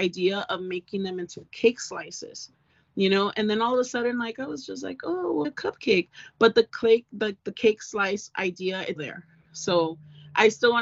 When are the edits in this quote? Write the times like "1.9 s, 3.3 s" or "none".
5.4 s, 9.0 s